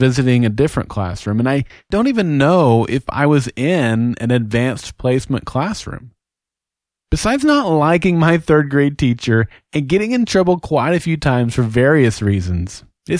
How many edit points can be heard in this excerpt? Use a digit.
0